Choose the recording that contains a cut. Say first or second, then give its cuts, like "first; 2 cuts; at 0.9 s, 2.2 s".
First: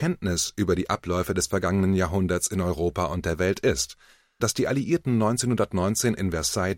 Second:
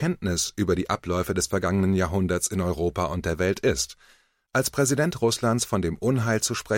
first; 1 cut; at 4.4 s